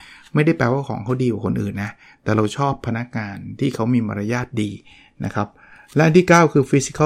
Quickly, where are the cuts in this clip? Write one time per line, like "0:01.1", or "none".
none

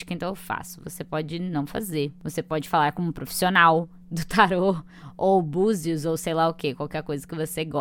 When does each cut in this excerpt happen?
none

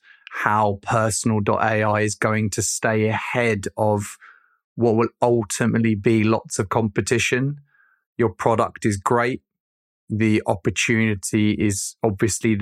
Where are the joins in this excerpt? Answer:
none

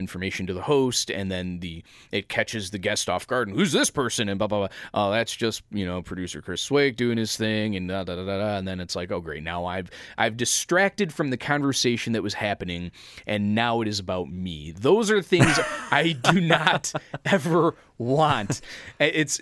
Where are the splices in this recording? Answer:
none

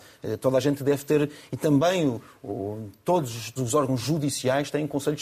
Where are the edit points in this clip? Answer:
0:03.6

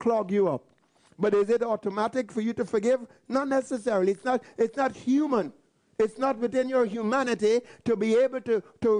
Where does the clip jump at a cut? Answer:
none

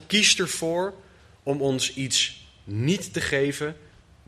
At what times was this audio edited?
none

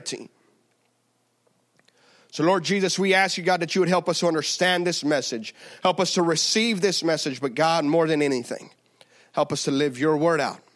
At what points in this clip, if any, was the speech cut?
none

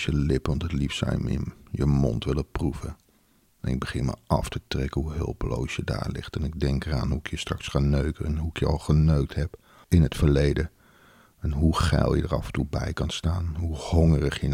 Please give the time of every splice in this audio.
none

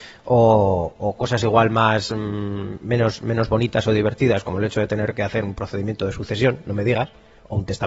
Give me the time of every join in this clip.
none

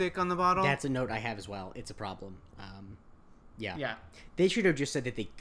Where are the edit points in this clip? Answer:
none

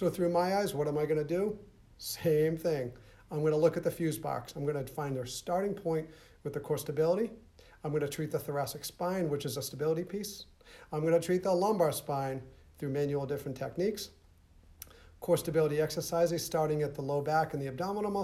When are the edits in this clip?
none

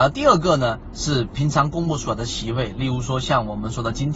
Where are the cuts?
none

